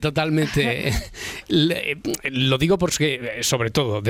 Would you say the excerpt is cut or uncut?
uncut